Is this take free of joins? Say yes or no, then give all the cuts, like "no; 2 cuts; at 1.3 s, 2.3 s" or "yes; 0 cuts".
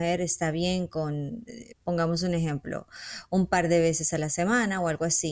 no; 1 cut; at 1.7 s